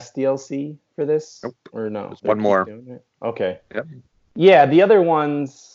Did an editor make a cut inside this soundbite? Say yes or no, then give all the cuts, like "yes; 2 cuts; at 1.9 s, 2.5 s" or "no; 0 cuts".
no; 0 cuts